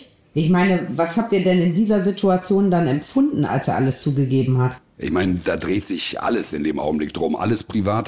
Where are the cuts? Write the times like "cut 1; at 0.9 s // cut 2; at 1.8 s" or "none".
cut 1; at 4.9 s